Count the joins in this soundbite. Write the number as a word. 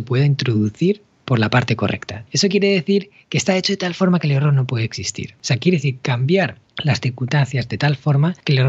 two